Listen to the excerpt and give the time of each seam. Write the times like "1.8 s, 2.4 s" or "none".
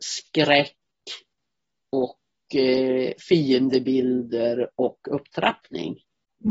none